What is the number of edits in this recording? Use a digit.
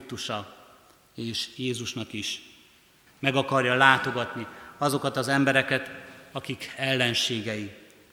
1